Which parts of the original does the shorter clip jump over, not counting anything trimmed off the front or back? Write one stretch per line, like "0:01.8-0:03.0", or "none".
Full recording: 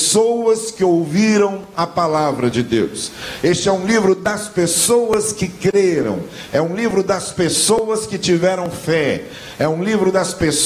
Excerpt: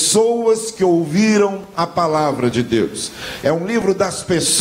0:03.4-0:06.5